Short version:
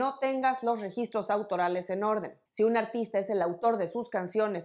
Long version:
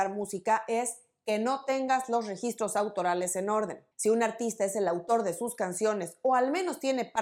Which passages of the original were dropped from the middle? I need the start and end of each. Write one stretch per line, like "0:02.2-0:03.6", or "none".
none